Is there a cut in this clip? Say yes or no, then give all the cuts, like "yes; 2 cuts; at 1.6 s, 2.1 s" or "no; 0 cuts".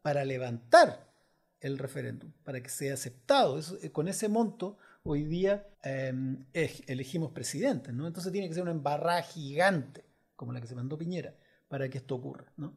yes; 1 cut; at 5.7 s